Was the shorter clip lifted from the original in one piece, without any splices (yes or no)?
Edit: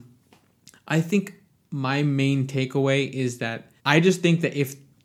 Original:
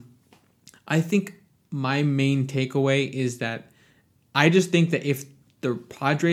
no